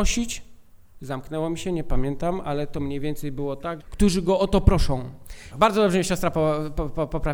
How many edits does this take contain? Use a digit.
2